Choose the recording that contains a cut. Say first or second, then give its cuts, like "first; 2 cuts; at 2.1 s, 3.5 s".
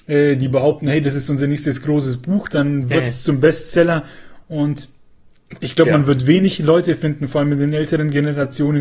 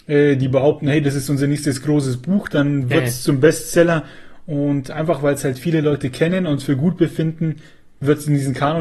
first; 1 cut; at 4.4 s